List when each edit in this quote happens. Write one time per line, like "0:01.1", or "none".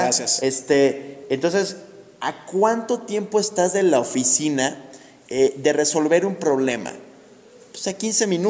none